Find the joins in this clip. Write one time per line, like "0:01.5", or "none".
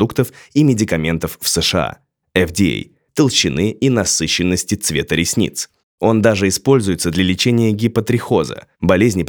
0:03.1